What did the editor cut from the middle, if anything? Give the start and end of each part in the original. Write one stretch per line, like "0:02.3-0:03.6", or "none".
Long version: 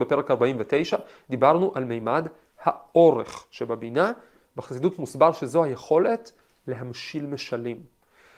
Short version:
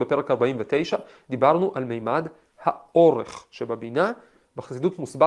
none